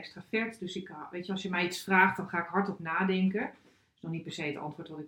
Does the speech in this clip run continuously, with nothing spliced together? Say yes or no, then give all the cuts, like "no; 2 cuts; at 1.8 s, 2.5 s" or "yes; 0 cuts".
yes; 0 cuts